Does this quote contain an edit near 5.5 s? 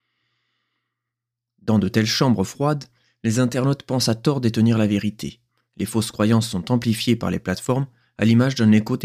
no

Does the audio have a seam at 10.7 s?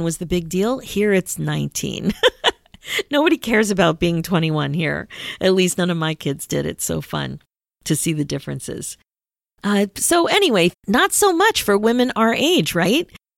yes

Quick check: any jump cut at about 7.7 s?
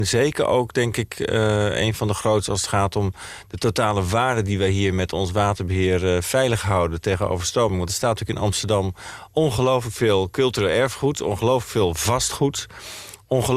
no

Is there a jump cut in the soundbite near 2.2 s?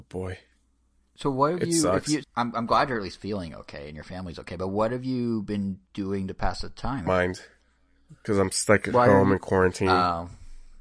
yes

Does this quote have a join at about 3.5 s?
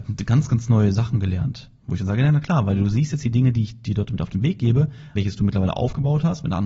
no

